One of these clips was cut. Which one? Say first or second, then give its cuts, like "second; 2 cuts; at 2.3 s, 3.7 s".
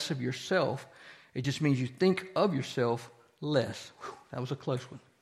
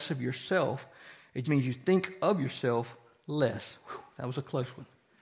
second; 1 cut; at 1.4 s